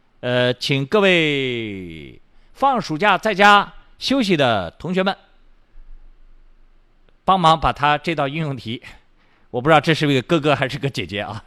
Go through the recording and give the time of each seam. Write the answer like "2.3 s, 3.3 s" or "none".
none

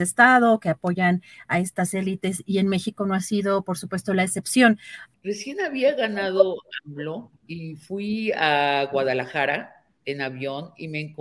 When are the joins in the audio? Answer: 5.1 s, 7.4 s

